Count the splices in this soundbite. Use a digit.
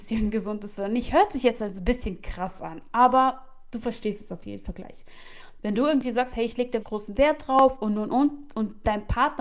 2